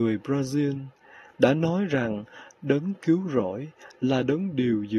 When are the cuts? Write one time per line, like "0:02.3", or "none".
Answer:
0:01.3